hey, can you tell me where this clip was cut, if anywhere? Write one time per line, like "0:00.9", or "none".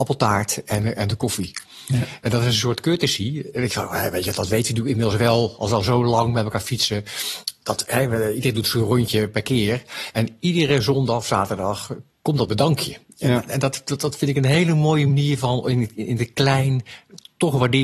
none